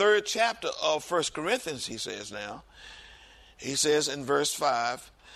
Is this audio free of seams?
yes; 0 cuts

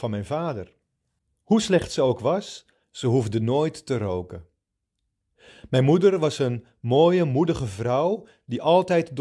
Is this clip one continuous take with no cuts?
no; 1 cut; at 2.8 s

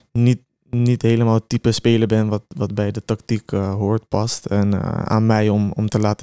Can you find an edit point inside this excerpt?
no; 0 cuts

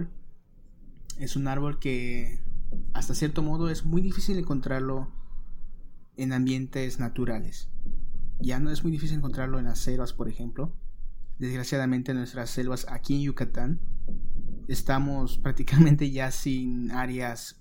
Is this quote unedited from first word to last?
yes; 0 cuts

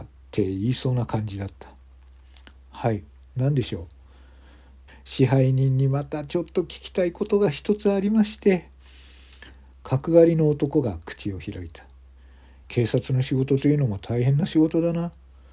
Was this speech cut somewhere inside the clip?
yes; 2 cuts; at 4.9 s, 12.6 s

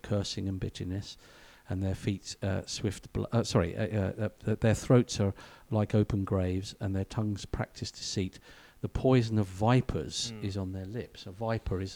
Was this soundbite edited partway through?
no; 0 cuts

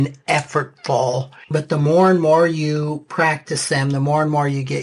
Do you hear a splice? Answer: yes; 1 cut; at 1.4 s

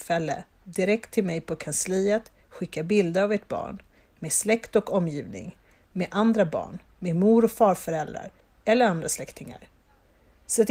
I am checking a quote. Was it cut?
no; 0 cuts

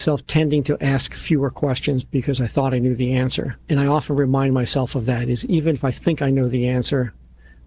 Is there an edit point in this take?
yes; 1 cut; at 3.6 s

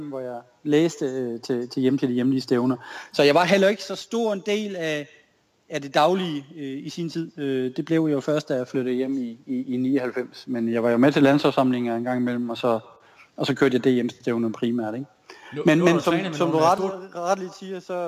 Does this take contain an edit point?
no; 0 cuts

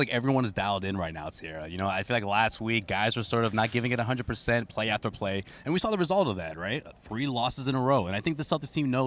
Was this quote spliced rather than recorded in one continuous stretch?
no; 0 cuts

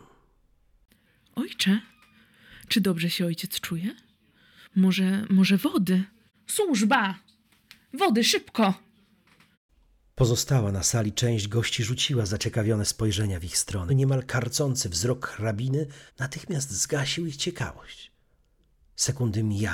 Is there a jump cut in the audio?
yes; 2 cuts; at 13.9 s, 16.1 s

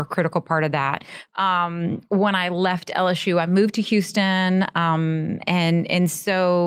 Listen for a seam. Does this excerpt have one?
yes; 1 cut; at 1.3 s

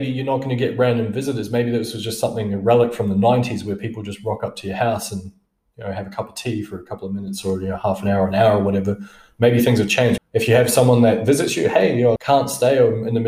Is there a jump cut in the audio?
yes; 2 cuts; at 10.2 s, 12.2 s

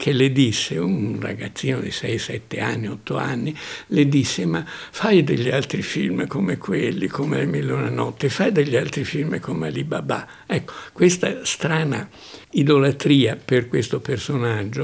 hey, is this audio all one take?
no; 1 cut; at 12.4 s

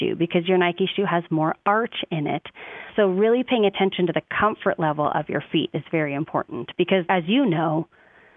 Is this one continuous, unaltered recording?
yes; 0 cuts

